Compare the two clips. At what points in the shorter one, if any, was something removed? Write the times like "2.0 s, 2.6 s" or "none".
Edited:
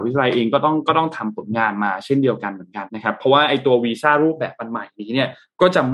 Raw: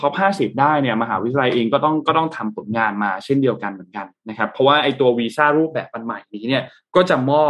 2.9 s